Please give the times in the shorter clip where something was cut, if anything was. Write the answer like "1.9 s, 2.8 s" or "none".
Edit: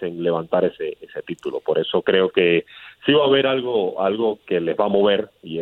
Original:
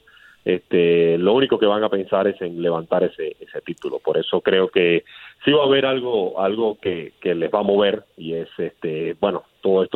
4.4 s